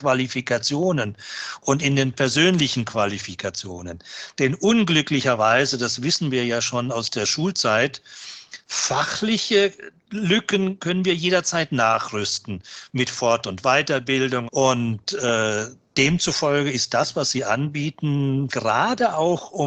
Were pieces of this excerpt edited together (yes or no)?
yes